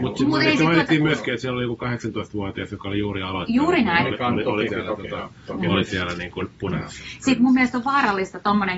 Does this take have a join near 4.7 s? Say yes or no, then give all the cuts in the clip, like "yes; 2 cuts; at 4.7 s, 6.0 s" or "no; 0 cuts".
yes; 1 cut; at 4.7 s